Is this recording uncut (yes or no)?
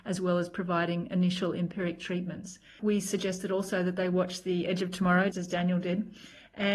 no